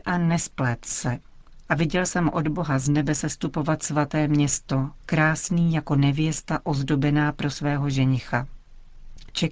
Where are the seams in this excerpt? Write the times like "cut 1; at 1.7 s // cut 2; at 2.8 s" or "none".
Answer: cut 1; at 1.7 s // cut 2; at 5.0 s